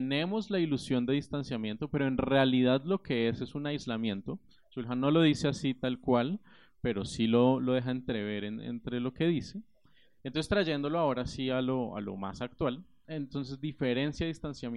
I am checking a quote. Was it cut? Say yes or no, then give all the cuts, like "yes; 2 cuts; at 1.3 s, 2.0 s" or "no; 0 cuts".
yes; 2 cuts; at 10.2 s, 13.0 s